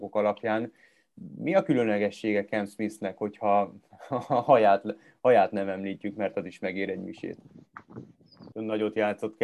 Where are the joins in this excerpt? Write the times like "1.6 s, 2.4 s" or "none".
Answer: 8.5 s